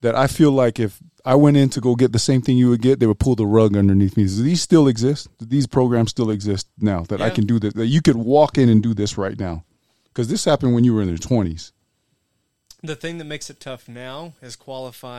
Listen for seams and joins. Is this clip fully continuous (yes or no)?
yes